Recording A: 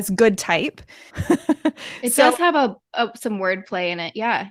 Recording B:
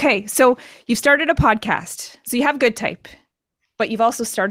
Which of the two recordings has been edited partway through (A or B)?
A